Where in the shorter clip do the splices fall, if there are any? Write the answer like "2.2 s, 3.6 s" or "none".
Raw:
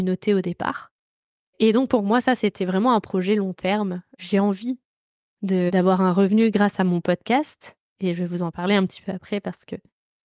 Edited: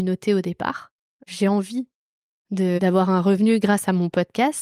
1.2 s